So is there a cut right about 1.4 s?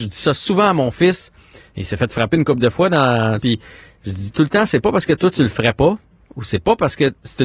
no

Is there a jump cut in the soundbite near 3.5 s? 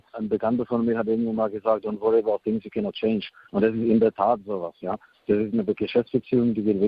no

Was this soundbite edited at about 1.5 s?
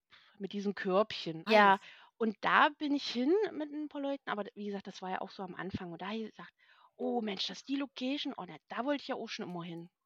yes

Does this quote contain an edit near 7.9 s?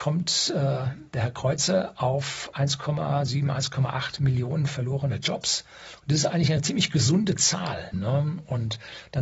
yes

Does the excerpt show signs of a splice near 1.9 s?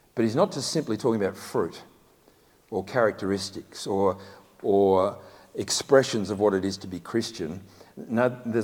no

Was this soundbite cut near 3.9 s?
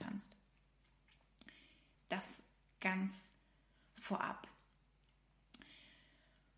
no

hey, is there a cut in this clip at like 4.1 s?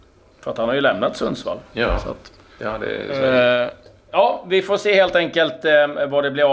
yes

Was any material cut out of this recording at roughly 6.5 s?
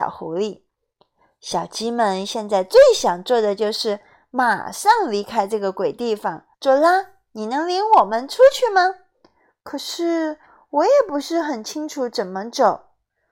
yes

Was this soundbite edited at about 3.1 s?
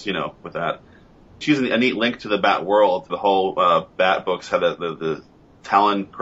yes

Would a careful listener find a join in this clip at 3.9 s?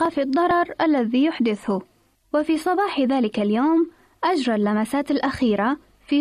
no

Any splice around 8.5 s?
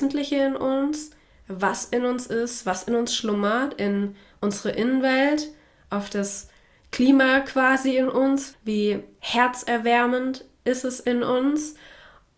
yes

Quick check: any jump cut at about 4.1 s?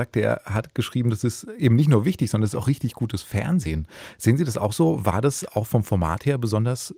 no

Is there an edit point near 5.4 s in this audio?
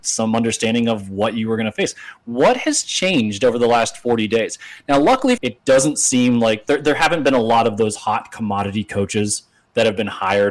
yes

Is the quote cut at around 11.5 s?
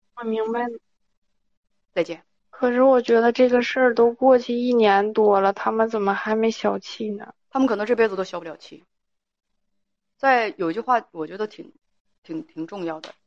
no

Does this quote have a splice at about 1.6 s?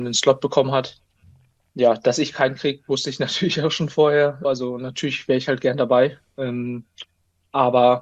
no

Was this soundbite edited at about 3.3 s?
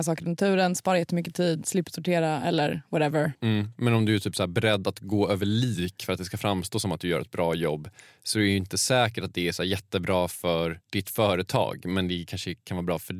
yes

